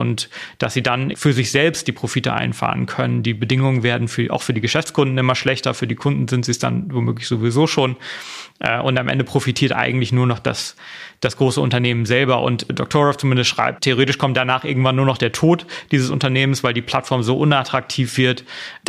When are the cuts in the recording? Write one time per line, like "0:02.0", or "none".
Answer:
0:01.1